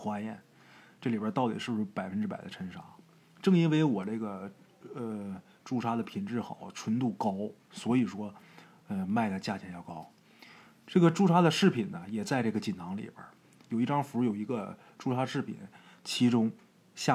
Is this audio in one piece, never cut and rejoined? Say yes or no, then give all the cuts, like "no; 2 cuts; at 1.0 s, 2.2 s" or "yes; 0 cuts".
yes; 0 cuts